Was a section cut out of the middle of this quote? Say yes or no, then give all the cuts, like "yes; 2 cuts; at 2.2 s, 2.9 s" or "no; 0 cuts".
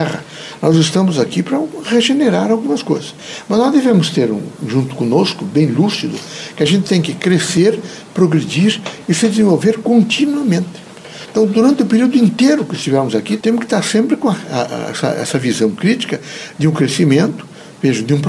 yes; 1 cut; at 13.4 s